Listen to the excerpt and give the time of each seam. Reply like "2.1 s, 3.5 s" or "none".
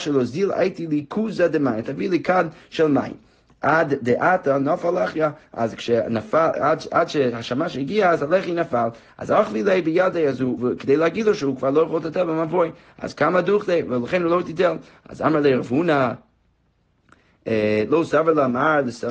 10.6 s

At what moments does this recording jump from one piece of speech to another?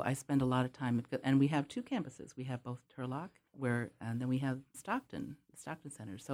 3.5 s, 4.7 s

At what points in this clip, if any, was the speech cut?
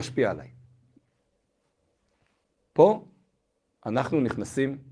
none

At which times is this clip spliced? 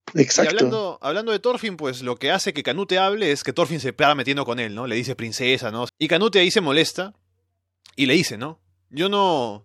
5.9 s

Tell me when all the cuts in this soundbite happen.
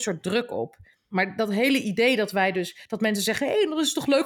none

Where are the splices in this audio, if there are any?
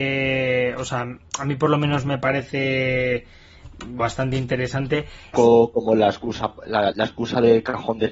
4.0 s, 5.3 s, 6.9 s

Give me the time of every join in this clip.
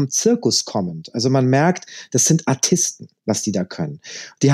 3.2 s

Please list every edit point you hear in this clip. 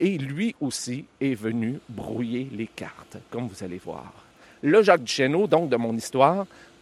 none

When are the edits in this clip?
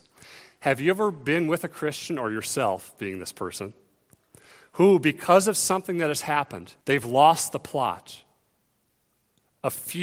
6.8 s

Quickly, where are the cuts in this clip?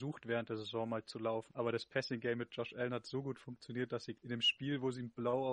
1.5 s, 4.1 s

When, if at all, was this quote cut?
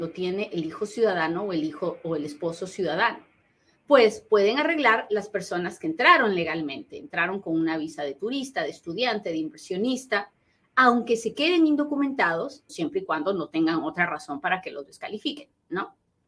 12.7 s

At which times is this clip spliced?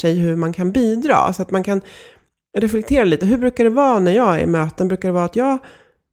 none

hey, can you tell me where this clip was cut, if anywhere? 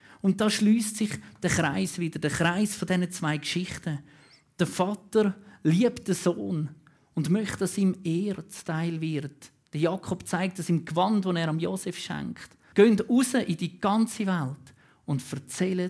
12.7 s

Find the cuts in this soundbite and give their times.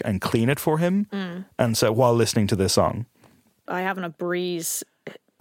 3.7 s

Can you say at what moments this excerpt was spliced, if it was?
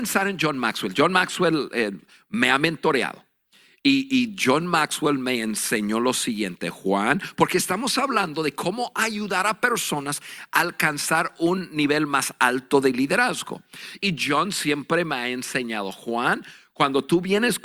14.0 s

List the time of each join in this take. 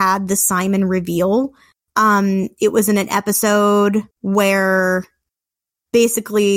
4.1 s

